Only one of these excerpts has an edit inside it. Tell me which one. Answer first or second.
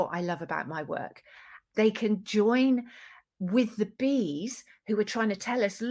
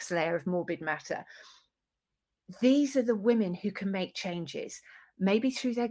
first